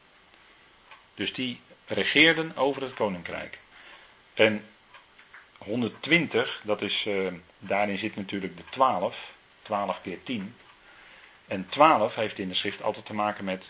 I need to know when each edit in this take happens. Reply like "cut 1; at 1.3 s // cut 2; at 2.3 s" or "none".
cut 1; at 7.5 s